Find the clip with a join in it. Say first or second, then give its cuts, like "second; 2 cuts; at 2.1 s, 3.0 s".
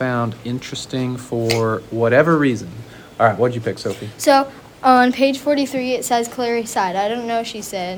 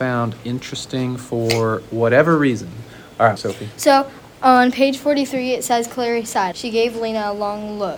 second; 2 cuts; at 3.4 s, 6.5 s